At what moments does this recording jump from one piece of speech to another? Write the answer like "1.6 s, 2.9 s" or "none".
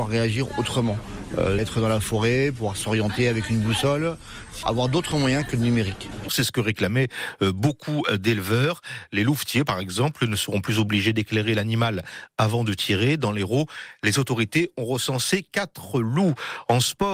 1.6 s, 6.3 s